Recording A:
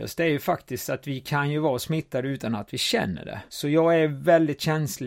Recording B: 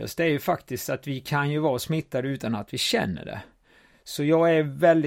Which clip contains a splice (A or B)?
A